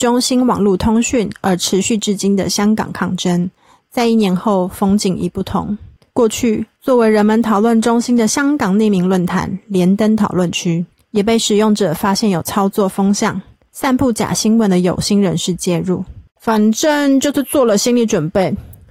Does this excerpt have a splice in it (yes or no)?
yes